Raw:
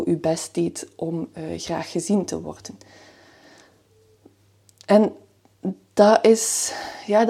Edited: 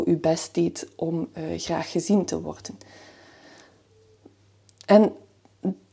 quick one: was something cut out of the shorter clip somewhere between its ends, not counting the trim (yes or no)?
no